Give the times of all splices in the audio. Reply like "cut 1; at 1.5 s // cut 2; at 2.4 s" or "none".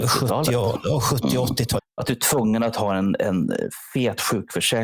cut 1; at 1.8 s